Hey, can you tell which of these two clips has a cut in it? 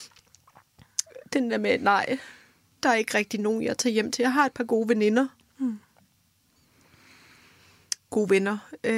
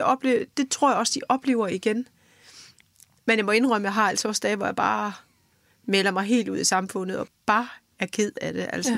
second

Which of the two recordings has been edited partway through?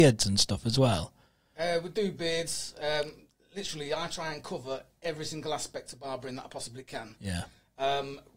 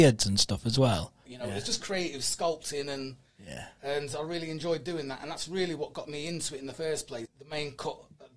second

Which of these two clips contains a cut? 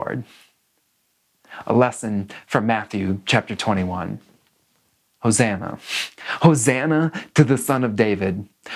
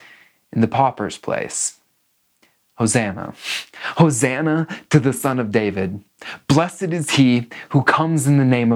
first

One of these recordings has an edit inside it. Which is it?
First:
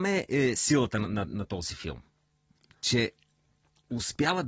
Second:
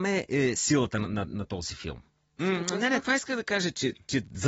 second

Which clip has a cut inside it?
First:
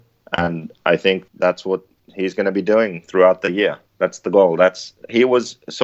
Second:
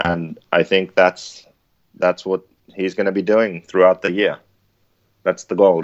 first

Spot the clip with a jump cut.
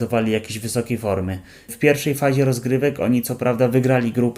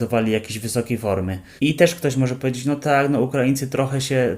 second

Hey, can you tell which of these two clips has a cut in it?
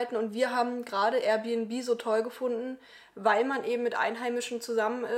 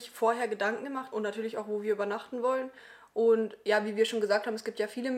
second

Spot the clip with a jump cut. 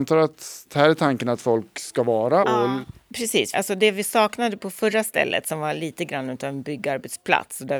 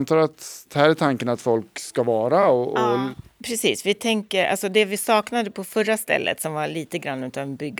first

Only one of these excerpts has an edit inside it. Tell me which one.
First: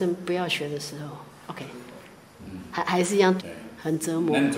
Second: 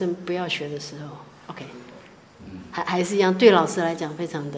first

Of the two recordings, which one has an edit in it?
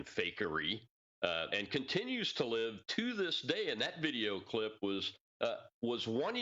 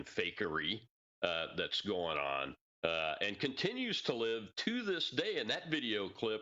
first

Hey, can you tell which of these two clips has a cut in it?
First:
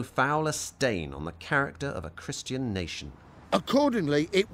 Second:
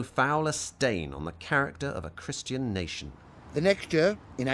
first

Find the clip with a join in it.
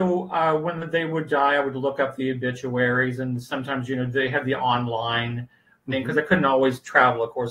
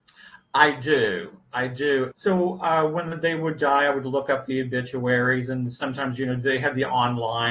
second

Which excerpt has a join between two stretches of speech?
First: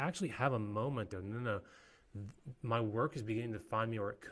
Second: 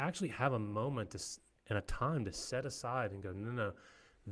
first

